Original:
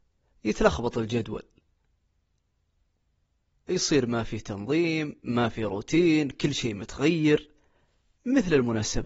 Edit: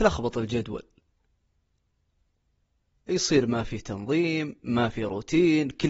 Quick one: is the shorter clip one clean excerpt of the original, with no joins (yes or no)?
yes